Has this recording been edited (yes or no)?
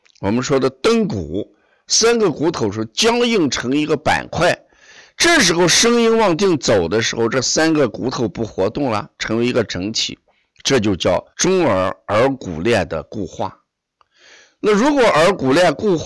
yes